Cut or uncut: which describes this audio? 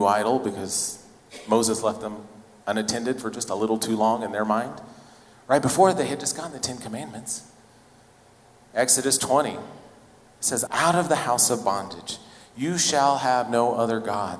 cut